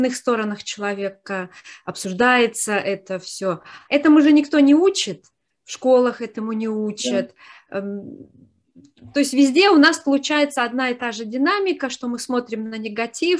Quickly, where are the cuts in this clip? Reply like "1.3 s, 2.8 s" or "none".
3.8 s